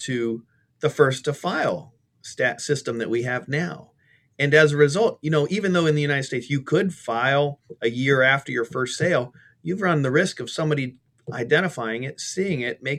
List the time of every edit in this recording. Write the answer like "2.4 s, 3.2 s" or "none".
2.6 s